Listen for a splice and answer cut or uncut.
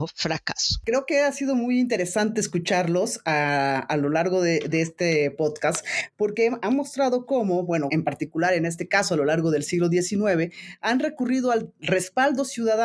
cut